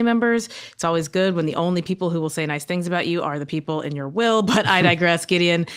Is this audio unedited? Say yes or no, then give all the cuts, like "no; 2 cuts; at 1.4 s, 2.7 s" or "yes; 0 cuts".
yes; 0 cuts